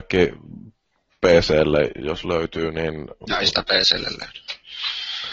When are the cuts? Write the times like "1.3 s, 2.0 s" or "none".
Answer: none